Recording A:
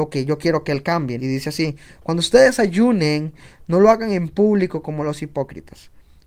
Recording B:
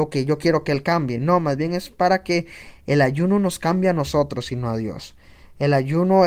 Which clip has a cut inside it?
A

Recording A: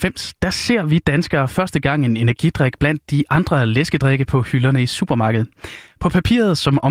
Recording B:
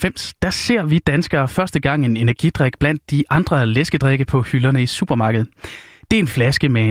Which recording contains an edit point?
A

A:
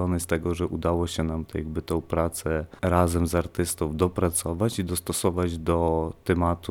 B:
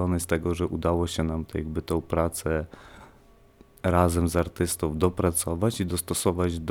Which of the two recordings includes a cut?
A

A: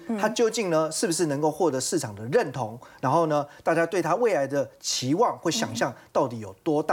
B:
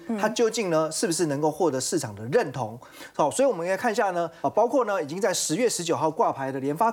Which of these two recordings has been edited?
B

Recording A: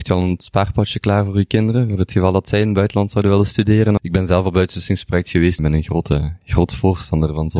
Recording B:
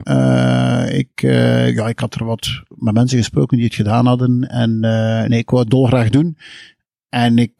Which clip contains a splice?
A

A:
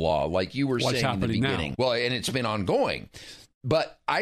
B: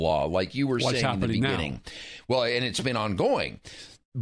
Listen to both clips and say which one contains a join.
A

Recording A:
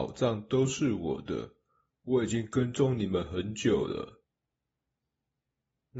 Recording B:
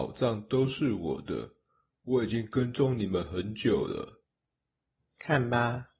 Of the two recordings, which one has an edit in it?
B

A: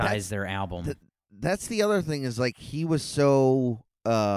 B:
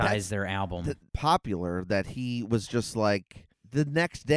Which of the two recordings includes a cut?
B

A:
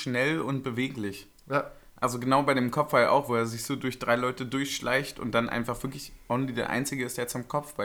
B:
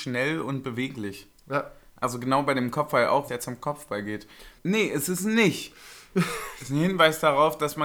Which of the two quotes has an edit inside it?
B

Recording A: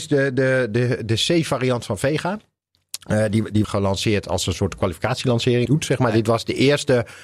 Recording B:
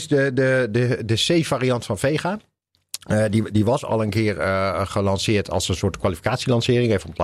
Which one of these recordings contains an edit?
A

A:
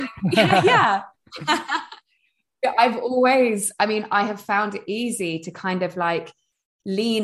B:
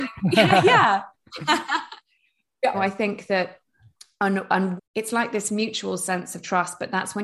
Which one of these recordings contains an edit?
B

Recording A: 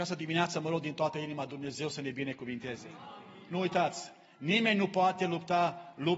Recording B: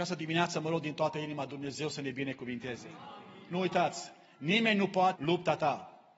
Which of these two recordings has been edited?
B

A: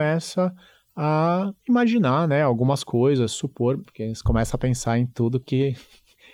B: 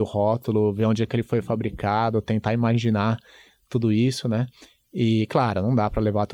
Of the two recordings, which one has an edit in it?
A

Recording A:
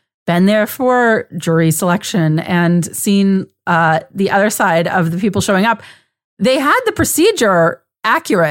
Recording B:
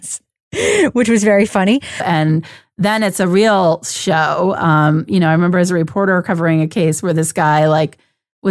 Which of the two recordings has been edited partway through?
B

